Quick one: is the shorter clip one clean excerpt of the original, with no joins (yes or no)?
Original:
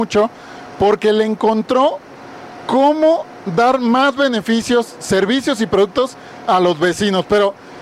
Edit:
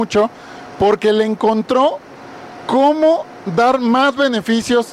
yes